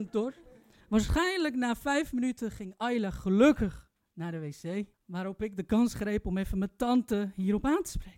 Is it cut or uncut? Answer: cut